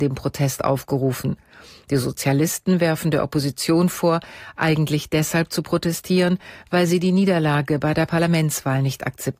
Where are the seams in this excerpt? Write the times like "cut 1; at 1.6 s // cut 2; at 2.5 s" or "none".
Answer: none